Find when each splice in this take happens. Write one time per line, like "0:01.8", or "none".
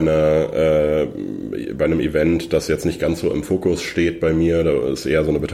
none

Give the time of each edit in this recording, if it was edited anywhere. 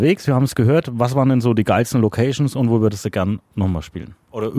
none

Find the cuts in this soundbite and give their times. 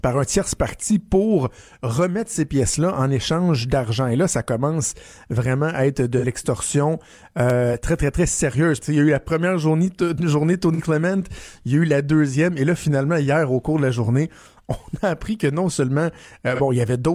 0:08.8

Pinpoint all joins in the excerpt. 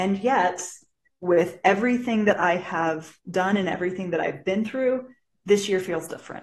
0:01.1
0:03.2

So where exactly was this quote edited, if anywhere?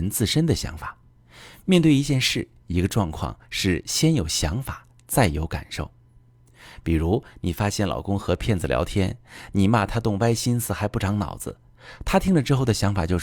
none

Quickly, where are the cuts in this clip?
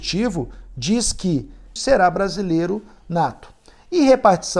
0:01.8

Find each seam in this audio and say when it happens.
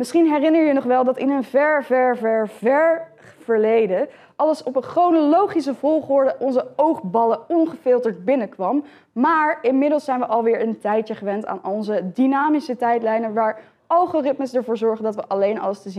0:02.2

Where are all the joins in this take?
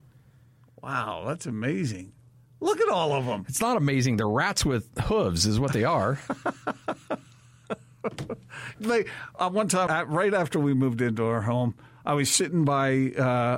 0:09.9

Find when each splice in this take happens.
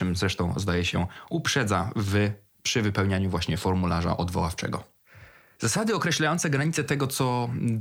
none

